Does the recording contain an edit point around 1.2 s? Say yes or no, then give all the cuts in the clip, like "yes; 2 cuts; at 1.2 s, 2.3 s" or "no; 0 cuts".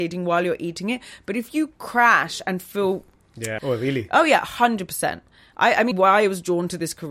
no; 2 cuts; at 3.6 s, 5.9 s